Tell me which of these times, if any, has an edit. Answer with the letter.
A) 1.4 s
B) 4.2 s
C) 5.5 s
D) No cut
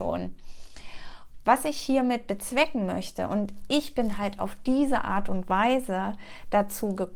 A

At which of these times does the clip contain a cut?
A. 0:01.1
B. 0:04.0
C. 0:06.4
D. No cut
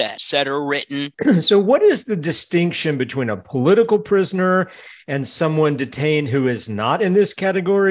A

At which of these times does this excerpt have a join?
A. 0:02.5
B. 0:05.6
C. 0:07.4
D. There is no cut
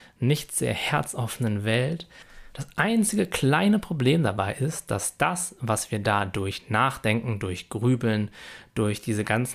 A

